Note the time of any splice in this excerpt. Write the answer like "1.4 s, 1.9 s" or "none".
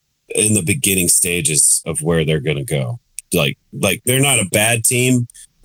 none